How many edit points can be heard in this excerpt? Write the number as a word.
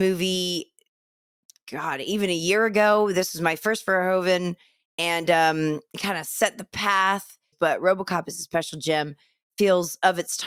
one